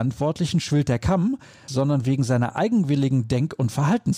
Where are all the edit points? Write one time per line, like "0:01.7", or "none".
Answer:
0:01.7